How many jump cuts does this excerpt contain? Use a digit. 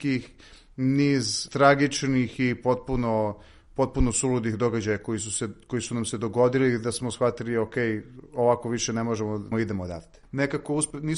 1